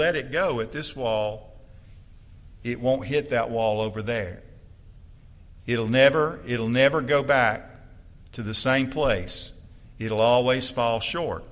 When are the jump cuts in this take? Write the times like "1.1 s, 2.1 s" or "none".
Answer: none